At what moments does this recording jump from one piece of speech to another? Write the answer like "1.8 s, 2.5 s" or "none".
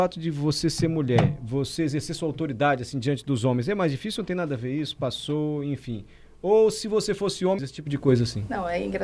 7.6 s